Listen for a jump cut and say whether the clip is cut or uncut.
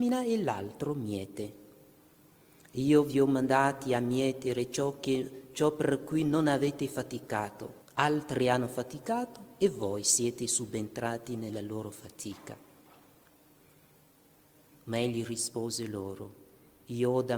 cut